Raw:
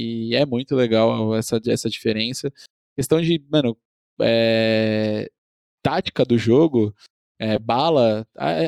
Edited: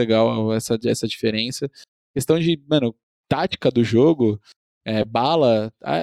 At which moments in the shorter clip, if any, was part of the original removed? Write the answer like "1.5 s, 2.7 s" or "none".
3.1 s